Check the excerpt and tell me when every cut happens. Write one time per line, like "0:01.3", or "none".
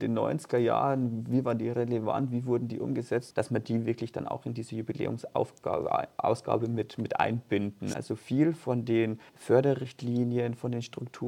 0:03.3
0:07.9
0:09.3